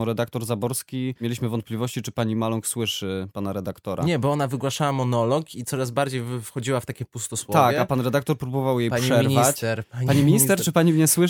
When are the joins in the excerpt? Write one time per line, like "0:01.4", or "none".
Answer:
none